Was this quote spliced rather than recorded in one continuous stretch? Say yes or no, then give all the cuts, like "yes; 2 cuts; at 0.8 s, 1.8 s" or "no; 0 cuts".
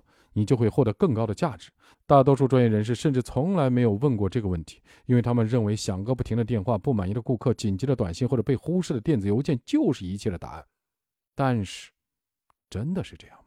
yes; 1 cut; at 1.9 s